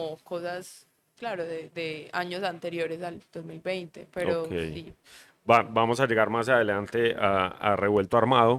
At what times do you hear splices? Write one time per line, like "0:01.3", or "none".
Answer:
none